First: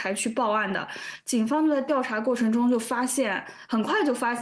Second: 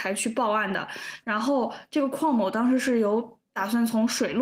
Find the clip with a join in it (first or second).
second